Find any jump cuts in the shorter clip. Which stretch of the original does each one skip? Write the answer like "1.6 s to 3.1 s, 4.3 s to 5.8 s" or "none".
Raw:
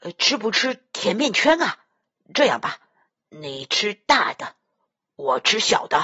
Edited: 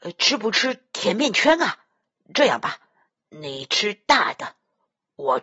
none